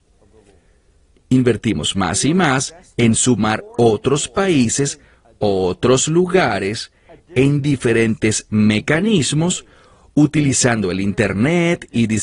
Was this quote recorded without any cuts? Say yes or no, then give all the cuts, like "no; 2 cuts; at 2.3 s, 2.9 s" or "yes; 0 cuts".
no; 1 cut; at 1.2 s